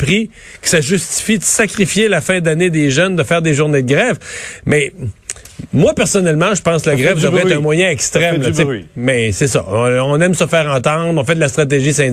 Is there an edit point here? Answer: no; 0 cuts

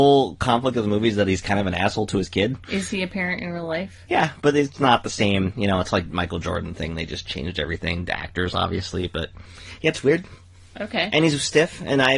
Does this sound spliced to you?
no; 0 cuts

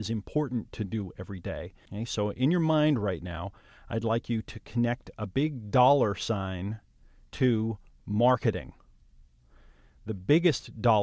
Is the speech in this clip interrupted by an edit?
yes; 1 cut; at 1.9 s

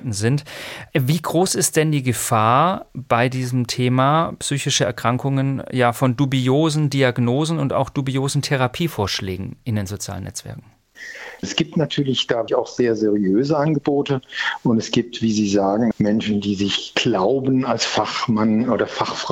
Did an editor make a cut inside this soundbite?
yes; 3 cuts; at 11.4 s, 12.5 s, 15.9 s

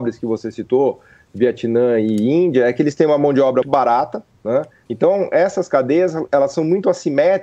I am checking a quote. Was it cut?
yes; 2 cuts; at 3.6 s, 4.9 s

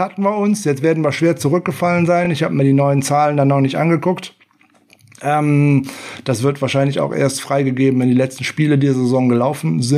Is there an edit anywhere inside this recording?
no; 0 cuts

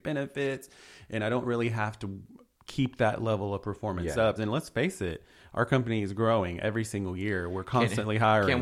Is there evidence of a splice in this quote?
yes; 1 cut; at 4.4 s

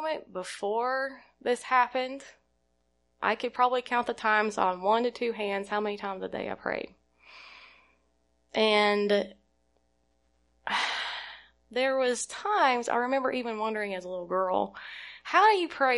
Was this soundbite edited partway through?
no; 0 cuts

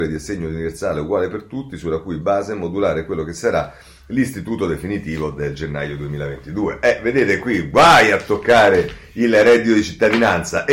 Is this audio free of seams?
yes; 0 cuts

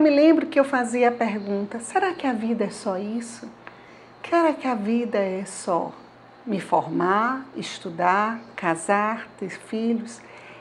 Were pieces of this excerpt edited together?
no; 0 cuts

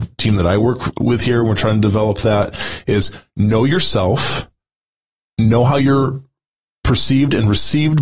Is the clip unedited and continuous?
yes; 0 cuts

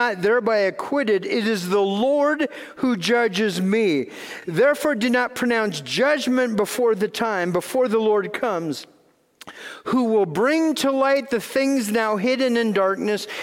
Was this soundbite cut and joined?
no; 0 cuts

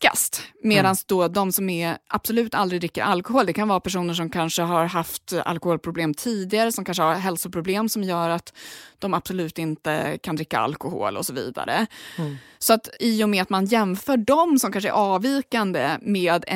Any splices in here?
yes; 1 cut; at 13.0 s

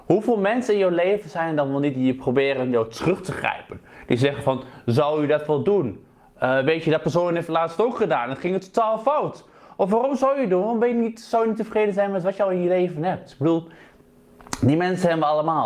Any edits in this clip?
no; 0 cuts

